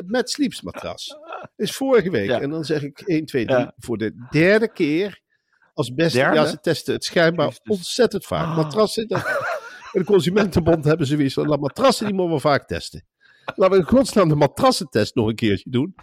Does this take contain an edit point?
no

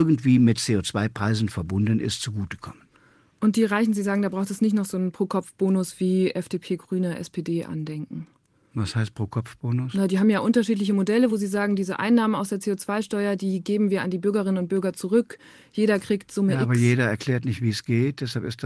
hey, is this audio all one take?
yes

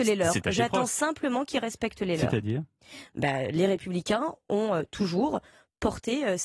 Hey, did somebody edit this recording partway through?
no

